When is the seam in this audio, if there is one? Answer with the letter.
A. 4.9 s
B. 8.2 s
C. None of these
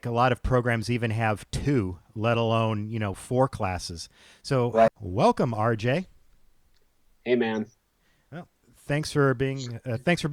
A